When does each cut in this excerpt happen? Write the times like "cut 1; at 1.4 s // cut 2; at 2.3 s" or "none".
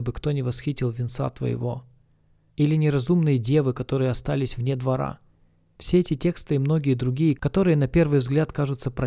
none